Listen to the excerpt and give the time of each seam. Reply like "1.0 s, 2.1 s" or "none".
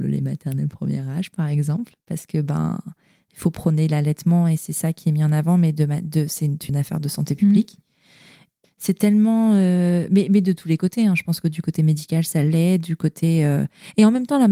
6.7 s, 8.6 s